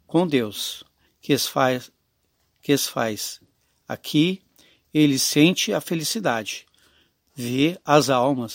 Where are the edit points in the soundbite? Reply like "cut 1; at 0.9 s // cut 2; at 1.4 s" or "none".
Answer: cut 1; at 1.1 s // cut 2; at 7.1 s